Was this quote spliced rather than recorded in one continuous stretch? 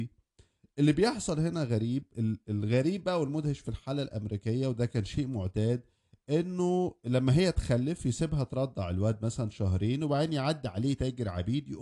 yes; 1 cut; at 2.1 s

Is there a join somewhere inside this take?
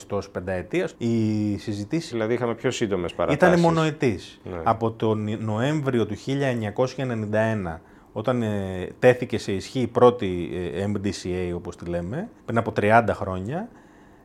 yes; 3 cuts; at 0.9 s, 2.1 s, 12.4 s

